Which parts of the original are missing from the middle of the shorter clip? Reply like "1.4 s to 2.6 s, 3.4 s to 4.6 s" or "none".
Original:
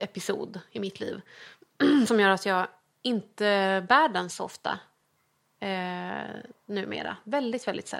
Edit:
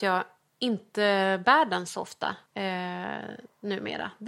4.9 s to 5.5 s